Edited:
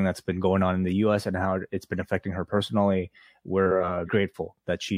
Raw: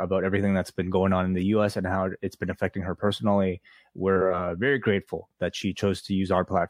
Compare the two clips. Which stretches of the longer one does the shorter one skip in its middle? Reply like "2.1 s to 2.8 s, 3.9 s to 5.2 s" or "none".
4.6 s to 4.8 s